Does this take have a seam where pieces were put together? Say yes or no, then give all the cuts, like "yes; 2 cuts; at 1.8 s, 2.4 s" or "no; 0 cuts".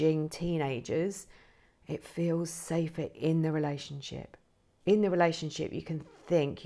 no; 0 cuts